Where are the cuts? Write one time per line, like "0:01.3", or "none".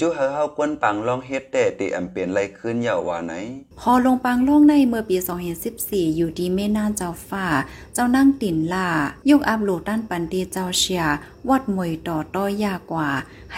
0:03.7